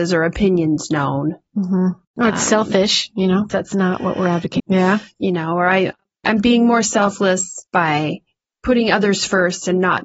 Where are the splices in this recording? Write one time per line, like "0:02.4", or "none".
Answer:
0:03.5
0:04.6
0:07.7